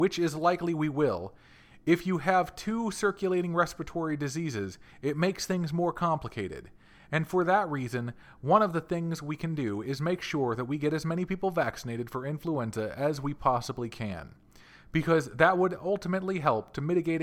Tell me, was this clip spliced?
no; 0 cuts

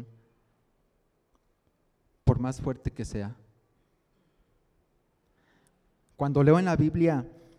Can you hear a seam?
no; 0 cuts

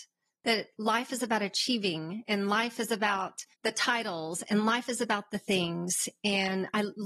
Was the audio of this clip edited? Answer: yes; 1 cut; at 3.5 s

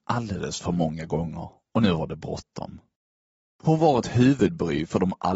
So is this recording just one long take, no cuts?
no; 1 cut; at 3.4 s

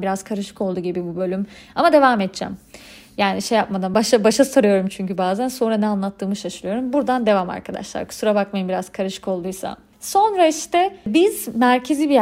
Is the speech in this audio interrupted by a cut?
no; 0 cuts

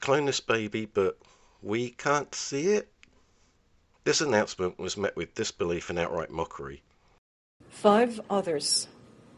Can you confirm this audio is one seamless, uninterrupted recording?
no; 1 cut; at 7.6 s

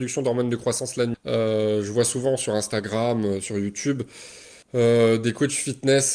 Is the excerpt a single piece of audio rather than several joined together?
no; 2 cuts; at 1.1 s, 4.6 s

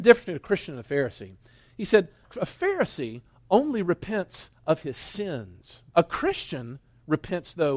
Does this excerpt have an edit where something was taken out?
yes; 2 cuts; at 2.2 s, 5.9 s

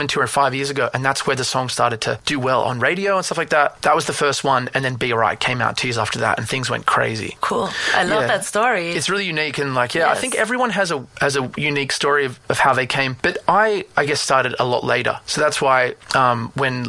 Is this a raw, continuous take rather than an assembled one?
yes; 0 cuts

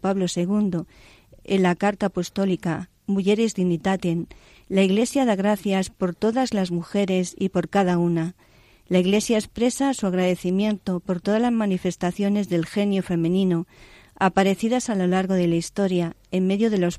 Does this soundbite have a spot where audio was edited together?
no; 0 cuts

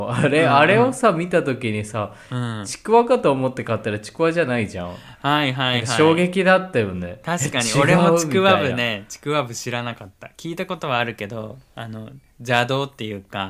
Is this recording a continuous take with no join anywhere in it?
yes; 0 cuts

